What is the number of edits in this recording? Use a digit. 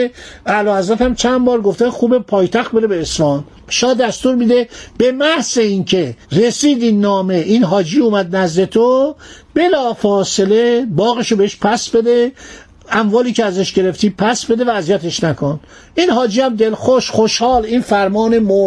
1